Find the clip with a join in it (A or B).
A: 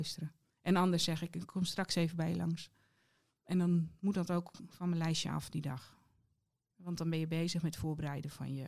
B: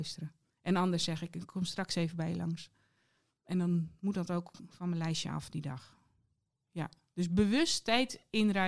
A